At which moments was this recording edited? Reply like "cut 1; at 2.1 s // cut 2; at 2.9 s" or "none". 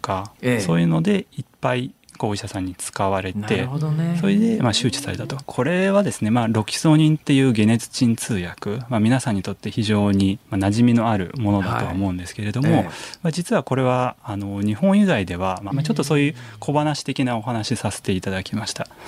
cut 1; at 5.4 s // cut 2; at 10.4 s // cut 3; at 15.7 s